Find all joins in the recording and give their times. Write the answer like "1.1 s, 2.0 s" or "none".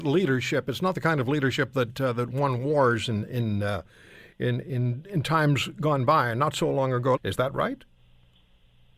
7.2 s